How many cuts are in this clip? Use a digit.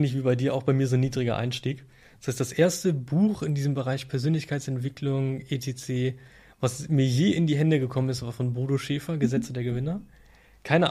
0